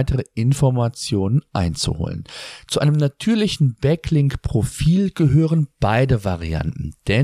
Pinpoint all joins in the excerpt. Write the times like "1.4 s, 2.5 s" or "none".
none